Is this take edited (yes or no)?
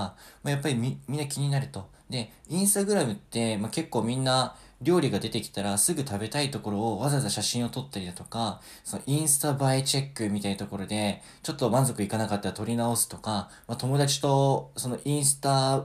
no